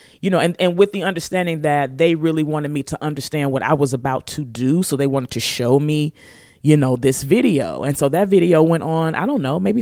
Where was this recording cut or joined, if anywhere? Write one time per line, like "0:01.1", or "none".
none